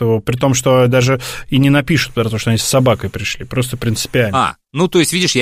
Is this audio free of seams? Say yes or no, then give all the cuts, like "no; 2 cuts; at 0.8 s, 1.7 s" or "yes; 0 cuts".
yes; 0 cuts